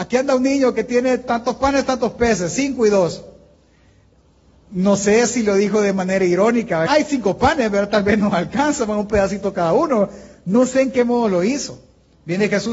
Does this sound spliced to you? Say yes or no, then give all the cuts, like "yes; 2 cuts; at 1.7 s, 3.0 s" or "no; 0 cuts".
yes; 1 cut; at 6.9 s